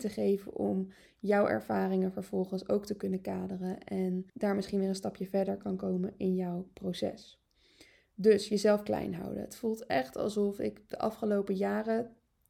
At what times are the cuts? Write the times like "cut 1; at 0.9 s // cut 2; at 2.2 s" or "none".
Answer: cut 1; at 4.3 s